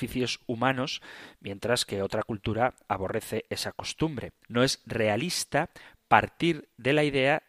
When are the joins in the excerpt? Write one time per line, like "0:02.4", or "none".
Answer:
0:04.4